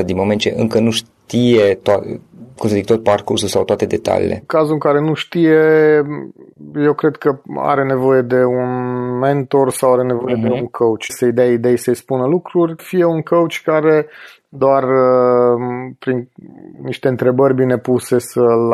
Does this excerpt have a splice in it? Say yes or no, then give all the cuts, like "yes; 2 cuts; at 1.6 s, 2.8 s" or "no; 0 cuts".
yes; 3 cuts; at 11.1 s, 12.8 s, 16.7 s